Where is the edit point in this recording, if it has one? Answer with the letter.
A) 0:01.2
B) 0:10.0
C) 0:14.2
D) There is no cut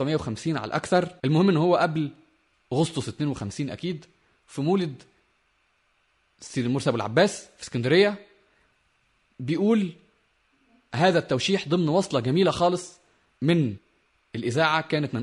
A